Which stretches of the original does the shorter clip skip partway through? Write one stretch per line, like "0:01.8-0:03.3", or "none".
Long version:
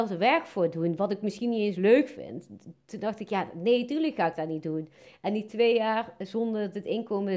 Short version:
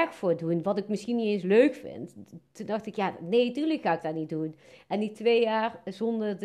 none

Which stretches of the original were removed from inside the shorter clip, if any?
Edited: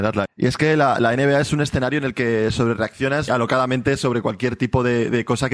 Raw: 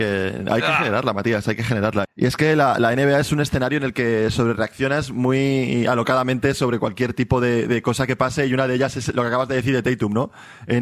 0:05.1-0:05.8

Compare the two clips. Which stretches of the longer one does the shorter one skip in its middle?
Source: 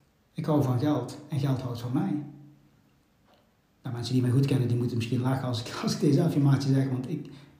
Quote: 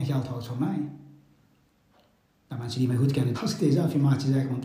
0:04.7-0:05.8

